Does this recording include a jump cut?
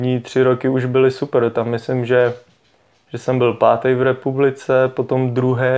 no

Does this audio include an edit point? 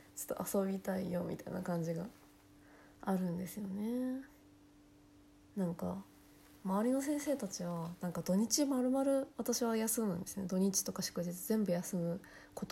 no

